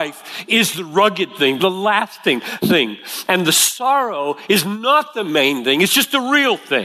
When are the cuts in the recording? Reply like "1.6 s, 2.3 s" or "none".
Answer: 1.6 s